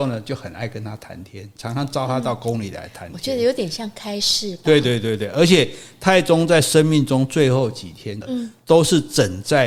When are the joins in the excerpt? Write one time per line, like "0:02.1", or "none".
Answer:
0:04.8
0:08.2